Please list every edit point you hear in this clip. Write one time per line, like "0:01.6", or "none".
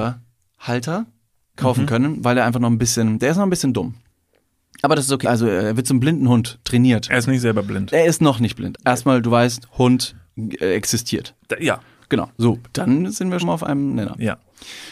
0:05.2
0:08.7
0:13.4